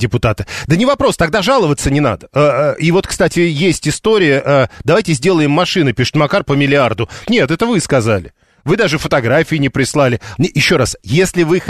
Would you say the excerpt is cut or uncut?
cut